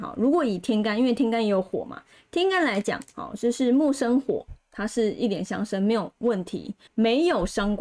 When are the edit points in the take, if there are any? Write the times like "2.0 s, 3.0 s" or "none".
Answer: 6.9 s